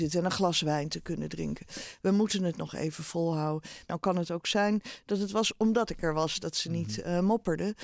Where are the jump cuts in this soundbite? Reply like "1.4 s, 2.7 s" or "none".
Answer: 3.9 s